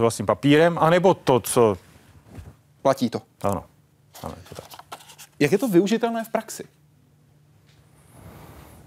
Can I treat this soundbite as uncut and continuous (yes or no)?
no